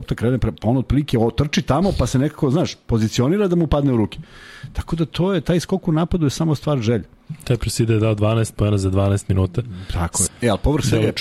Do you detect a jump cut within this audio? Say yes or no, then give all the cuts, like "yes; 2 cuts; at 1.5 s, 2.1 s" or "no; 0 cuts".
yes; 1 cut; at 10.3 s